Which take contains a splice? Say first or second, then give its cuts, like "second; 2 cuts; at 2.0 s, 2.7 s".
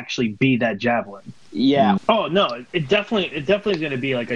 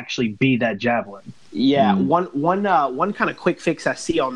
first; 1 cut; at 2.0 s